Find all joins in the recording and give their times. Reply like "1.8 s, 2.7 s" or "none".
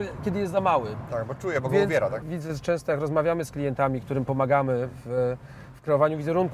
2.2 s